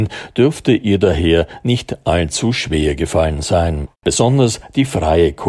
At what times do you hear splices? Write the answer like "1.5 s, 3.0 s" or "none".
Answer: 3.9 s